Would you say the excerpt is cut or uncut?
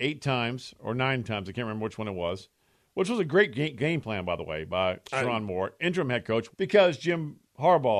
cut